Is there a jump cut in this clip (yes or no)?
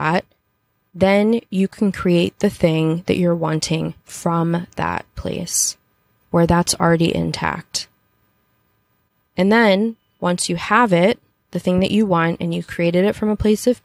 no